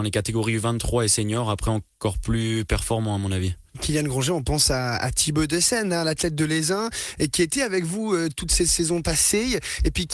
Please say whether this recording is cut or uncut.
uncut